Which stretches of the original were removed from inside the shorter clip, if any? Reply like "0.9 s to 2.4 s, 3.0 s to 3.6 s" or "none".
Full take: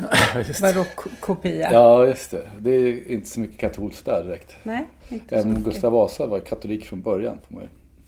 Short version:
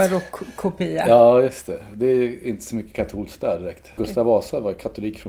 4.6 s to 5.6 s